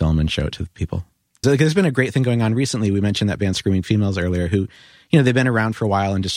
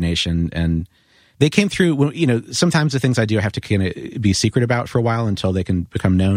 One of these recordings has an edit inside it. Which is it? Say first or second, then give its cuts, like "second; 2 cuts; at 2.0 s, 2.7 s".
first; 1 cut; at 1.4 s